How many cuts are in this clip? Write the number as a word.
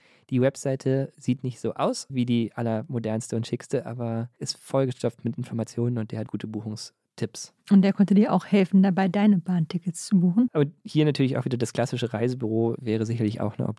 two